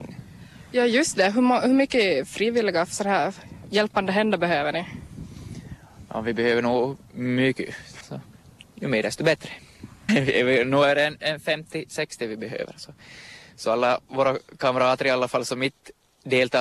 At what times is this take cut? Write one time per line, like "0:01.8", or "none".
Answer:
0:08.0
0:10.1

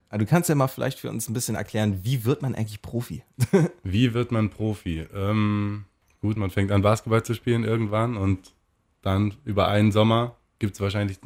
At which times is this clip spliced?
0:06.4

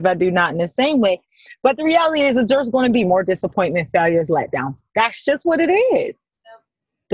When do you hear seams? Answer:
none

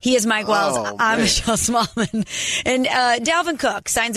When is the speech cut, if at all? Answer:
none

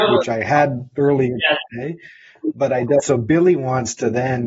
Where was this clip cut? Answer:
0:03.0

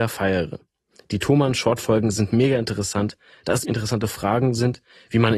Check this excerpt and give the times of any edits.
0:03.6

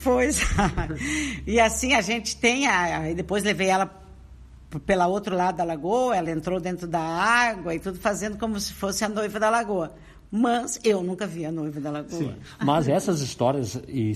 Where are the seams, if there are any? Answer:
none

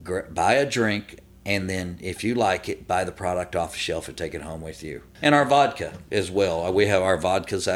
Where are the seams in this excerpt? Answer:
none

